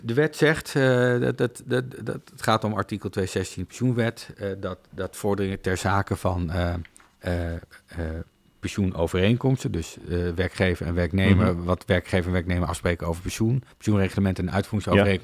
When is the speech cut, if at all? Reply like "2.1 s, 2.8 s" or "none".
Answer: 13.7 s